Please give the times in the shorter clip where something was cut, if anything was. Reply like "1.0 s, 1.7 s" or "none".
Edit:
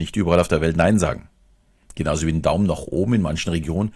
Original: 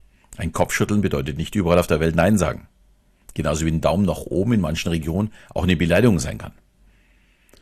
none